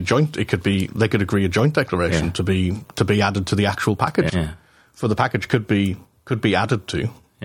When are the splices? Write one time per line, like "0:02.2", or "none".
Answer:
0:04.3